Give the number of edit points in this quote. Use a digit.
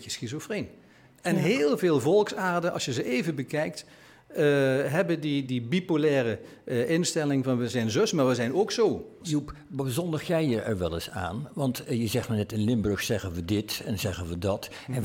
2